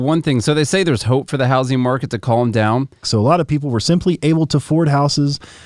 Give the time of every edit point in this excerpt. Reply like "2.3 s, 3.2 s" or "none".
3.0 s